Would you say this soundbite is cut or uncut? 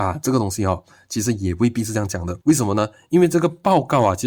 cut